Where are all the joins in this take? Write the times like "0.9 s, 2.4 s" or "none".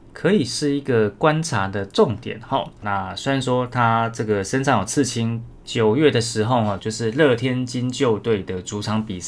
2.8 s, 5.6 s, 6.8 s